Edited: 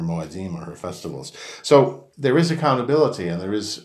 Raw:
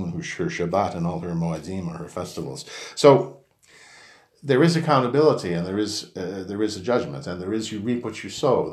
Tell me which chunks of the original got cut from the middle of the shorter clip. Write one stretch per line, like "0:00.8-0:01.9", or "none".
0:03.5-0:04.4